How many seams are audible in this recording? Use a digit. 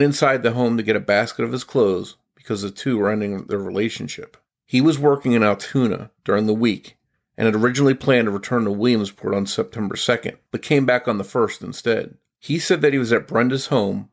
3